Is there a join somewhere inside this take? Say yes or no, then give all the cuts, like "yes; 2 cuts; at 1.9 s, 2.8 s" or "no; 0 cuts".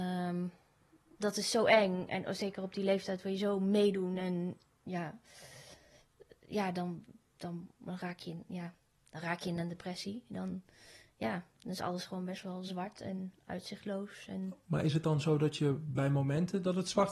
no; 0 cuts